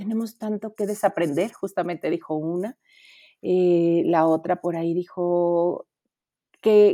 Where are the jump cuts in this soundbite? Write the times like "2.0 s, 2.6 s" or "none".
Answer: none